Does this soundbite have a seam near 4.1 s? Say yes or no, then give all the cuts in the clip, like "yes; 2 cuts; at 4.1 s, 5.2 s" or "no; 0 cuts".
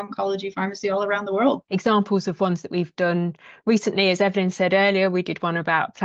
no; 1 cut; at 1.7 s